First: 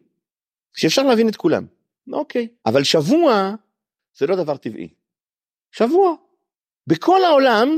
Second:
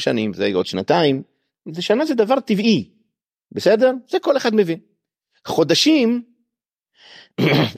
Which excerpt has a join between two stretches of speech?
first; 1 cut; at 2.6 s

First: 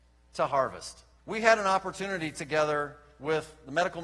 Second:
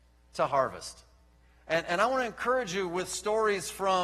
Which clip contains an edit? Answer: first; 1 cut; at 1.2 s

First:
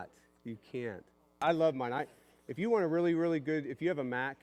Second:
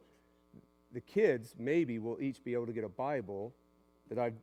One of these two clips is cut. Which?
first; 1 cut; at 1.4 s

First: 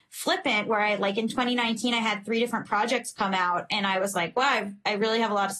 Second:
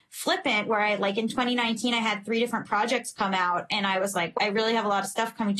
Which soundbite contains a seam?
second; 1 cut; at 4.4 s

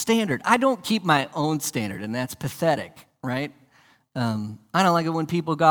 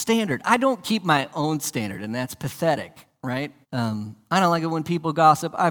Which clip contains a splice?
second; 1 cut; at 3.6 s

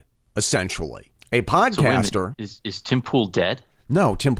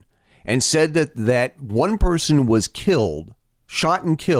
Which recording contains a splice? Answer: first; 1 cut; at 2.3 s

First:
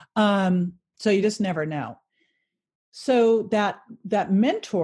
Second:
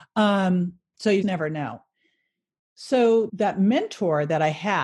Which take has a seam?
second; 2 cuts; at 1.2 s, 3.3 s

